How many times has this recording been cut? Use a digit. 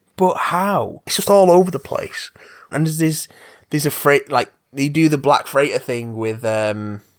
2